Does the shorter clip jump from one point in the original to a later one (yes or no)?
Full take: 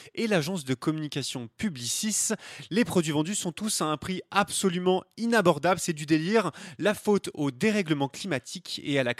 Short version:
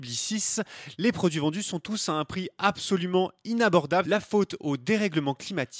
yes